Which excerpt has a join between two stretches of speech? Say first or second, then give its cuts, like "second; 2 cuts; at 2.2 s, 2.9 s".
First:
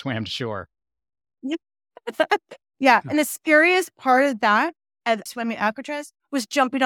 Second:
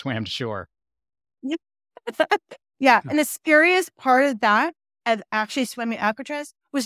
first; 1 cut; at 5.3 s